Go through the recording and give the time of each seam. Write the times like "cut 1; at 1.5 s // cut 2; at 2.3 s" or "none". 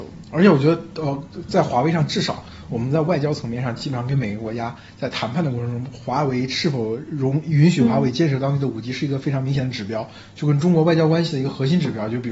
none